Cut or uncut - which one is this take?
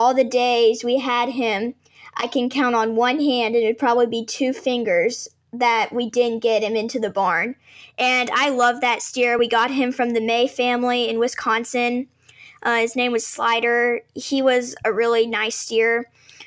uncut